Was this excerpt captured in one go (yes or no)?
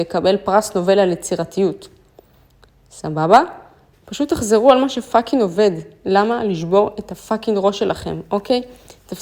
no